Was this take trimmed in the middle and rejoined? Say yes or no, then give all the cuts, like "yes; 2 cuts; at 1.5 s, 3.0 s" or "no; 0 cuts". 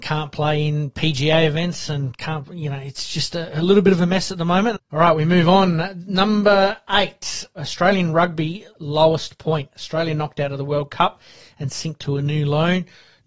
yes; 1 cut; at 4.8 s